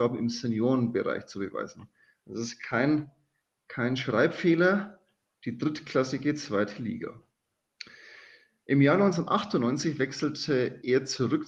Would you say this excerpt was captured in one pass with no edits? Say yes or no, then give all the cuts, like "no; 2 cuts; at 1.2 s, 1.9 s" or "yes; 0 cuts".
yes; 0 cuts